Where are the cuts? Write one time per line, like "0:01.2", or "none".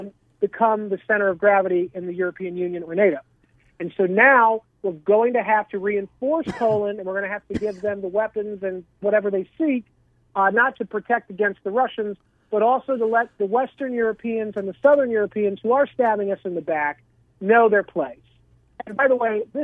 0:10.7